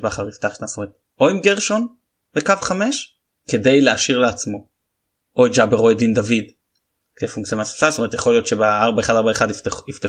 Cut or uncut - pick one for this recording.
uncut